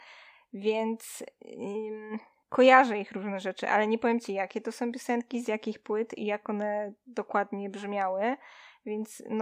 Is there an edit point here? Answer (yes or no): no